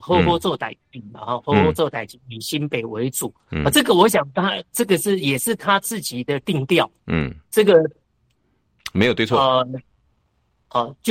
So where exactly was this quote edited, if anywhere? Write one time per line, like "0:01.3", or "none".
none